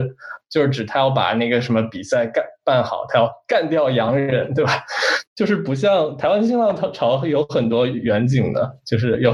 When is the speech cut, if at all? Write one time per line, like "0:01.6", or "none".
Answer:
0:05.2